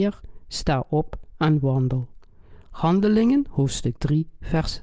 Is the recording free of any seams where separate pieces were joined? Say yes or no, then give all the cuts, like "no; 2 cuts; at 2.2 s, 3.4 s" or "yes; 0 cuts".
yes; 0 cuts